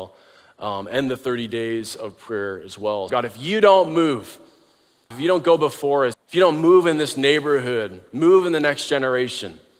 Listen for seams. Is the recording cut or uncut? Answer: cut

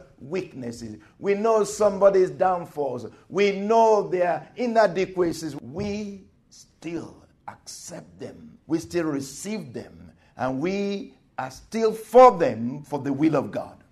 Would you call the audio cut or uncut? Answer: uncut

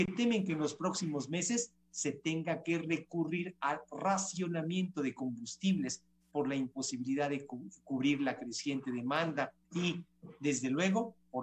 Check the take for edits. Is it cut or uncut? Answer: cut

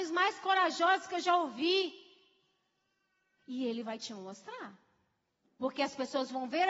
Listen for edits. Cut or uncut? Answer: cut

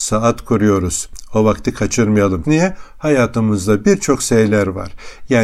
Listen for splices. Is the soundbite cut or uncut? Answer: cut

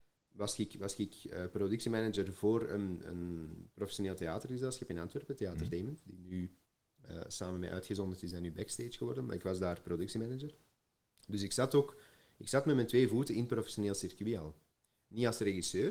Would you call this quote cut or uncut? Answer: uncut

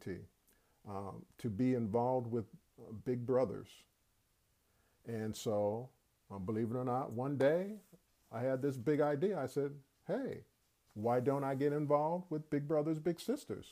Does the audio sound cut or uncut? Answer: uncut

